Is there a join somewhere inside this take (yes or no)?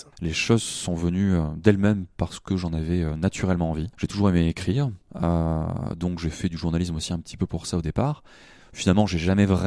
no